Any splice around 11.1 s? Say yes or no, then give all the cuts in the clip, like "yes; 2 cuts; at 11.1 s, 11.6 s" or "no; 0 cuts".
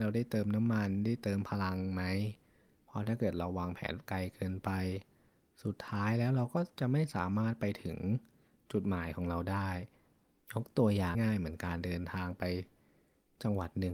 yes; 1 cut; at 11.1 s